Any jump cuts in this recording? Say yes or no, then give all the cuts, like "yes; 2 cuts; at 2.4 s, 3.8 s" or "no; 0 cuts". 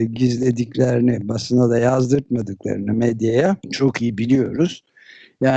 yes; 1 cut; at 3.6 s